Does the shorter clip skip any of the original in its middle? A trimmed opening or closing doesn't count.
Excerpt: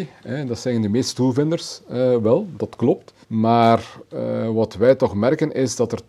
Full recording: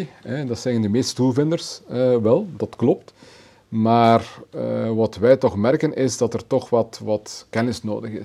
yes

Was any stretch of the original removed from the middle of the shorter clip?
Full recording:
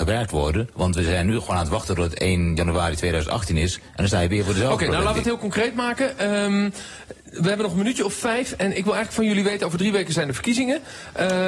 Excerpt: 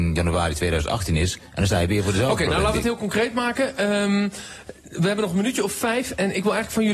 no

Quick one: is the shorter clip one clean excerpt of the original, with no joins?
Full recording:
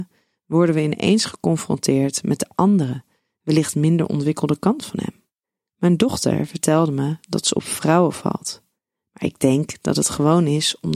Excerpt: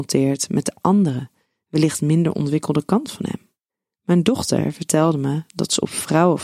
yes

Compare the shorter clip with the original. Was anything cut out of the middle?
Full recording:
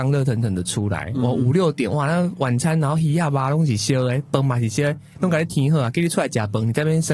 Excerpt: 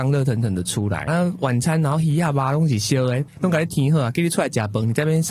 yes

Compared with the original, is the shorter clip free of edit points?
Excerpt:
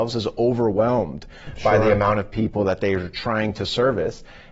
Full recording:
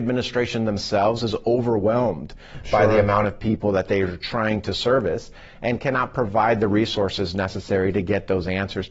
yes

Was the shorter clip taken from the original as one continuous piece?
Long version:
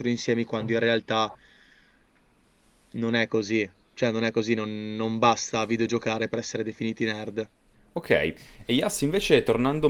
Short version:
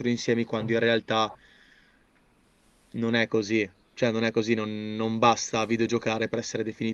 yes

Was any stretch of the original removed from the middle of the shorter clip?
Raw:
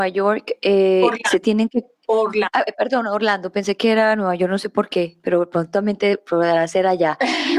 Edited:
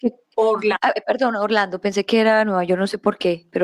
no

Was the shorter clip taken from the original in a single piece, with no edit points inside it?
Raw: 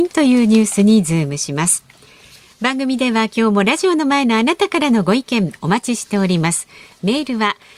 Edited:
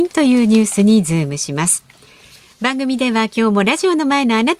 yes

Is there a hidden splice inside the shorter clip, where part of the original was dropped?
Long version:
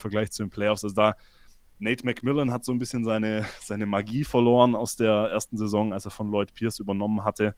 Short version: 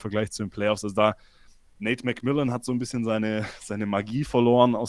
no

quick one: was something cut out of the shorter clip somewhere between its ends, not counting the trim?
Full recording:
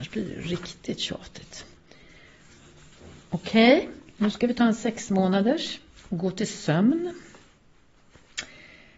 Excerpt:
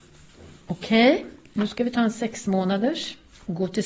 no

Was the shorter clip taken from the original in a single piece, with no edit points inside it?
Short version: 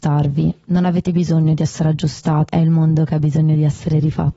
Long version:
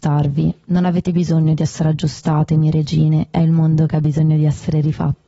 no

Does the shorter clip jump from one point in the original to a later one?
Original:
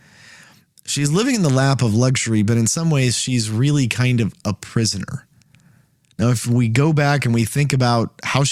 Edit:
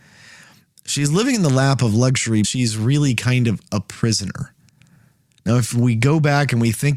yes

